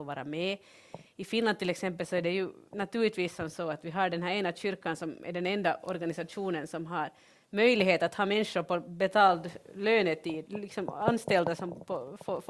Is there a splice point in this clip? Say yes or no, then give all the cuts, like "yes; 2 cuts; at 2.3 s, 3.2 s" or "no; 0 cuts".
no; 0 cuts